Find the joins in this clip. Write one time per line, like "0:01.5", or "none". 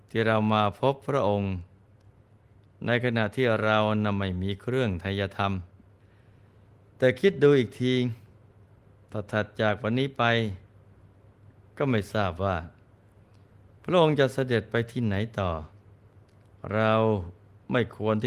none